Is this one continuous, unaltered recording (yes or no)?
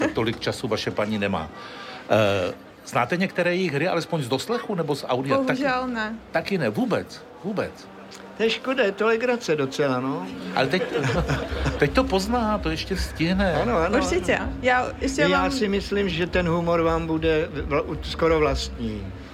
no